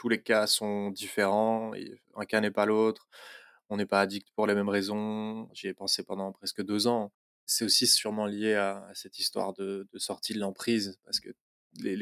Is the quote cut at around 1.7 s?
no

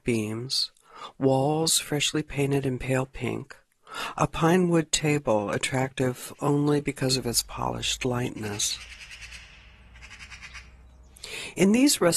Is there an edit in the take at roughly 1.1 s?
no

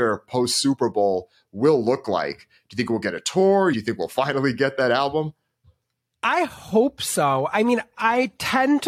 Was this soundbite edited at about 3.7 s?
yes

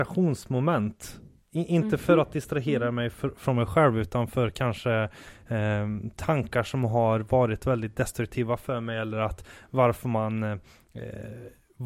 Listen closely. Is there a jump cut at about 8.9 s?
no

